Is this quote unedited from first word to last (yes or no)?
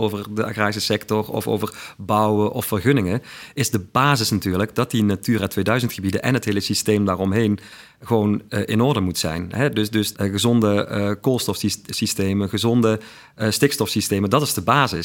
no